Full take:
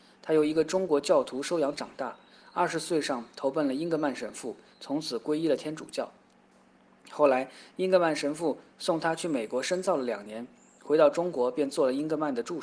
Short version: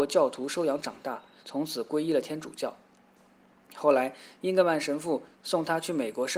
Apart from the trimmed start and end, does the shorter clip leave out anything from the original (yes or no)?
yes